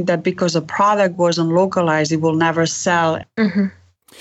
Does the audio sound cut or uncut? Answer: cut